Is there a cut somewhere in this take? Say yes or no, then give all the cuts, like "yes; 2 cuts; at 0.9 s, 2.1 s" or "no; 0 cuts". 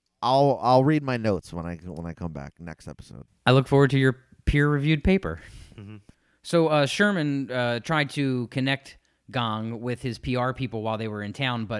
no; 0 cuts